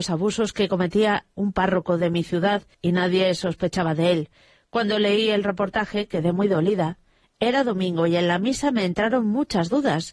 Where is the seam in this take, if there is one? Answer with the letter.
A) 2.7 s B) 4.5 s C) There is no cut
A